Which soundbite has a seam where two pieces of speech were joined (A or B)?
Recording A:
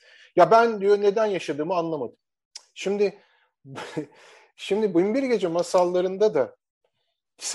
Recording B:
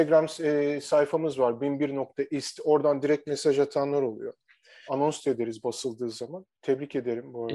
B